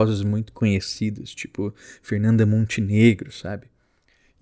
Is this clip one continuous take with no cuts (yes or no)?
yes